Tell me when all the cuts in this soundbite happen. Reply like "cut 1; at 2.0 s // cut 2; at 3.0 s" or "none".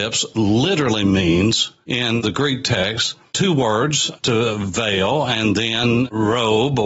cut 1; at 4.2 s